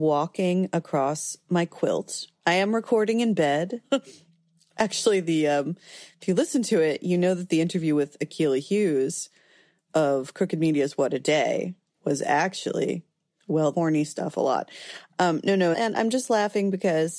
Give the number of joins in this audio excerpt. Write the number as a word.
three